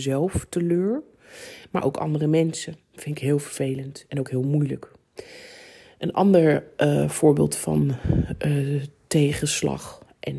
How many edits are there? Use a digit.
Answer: 0